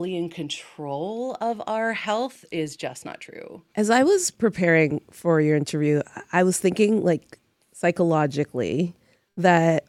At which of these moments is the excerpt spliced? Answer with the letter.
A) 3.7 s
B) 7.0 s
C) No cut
A